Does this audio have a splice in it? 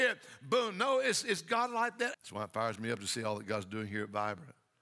yes; 1 cut; at 2.1 s

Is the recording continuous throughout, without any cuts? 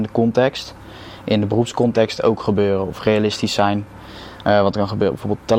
yes; 0 cuts

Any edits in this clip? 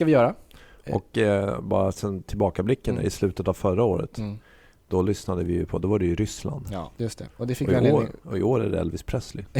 yes; 1 cut; at 7.0 s

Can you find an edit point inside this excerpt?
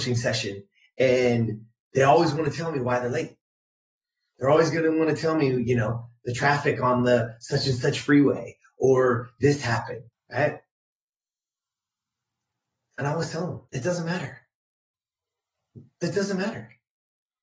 yes; 2 cuts; at 10.1 s, 13.7 s

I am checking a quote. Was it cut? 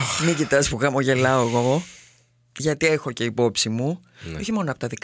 no; 0 cuts

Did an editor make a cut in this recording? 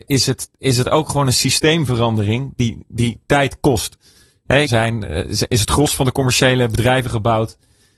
yes; 1 cut; at 4.6 s

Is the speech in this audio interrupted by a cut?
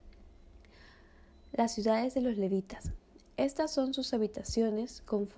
no; 0 cuts

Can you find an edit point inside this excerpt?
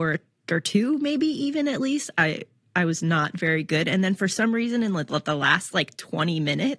no; 0 cuts

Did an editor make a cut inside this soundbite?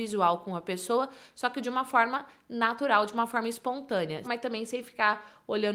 yes; 1 cut; at 4.2 s

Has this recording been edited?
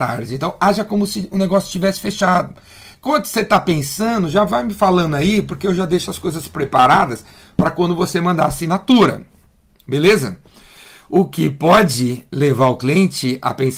yes; 1 cut; at 2.9 s

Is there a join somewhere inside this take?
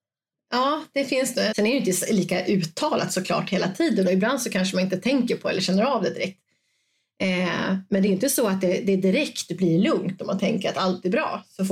yes; 1 cut; at 1.5 s

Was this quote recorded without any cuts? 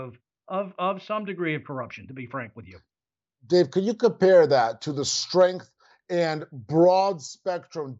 yes; 0 cuts

